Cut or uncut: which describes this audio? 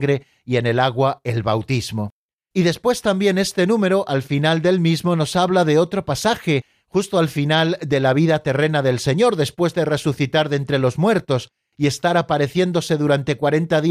uncut